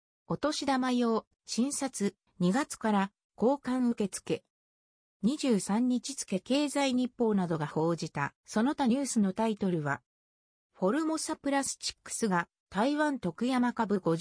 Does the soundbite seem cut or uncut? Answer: cut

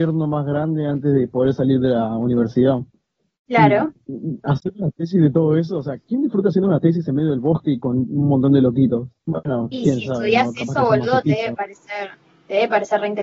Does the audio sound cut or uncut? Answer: uncut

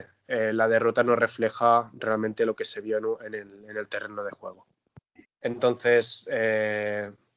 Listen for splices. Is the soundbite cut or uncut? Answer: cut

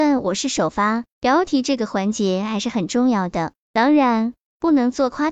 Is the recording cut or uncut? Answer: cut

